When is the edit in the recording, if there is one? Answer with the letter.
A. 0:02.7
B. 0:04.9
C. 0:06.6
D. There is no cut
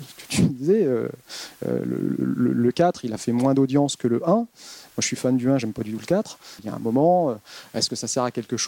C